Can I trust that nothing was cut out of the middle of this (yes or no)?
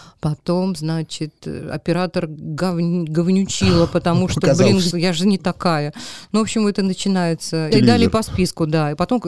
no